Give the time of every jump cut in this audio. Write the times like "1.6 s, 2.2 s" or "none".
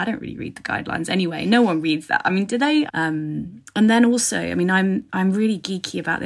2.9 s